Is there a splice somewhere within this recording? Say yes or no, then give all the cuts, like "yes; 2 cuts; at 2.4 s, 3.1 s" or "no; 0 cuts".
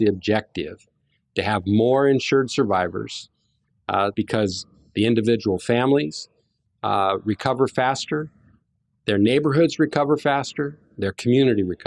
yes; 1 cut; at 4.1 s